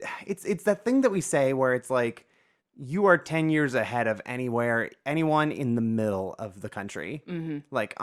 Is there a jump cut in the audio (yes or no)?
yes